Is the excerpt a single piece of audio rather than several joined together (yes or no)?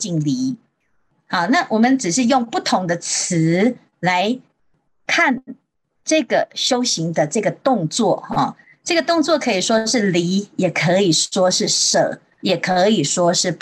yes